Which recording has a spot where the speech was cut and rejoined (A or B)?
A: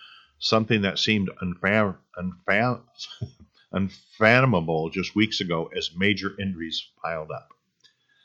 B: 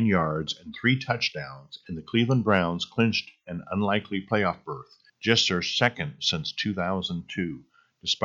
B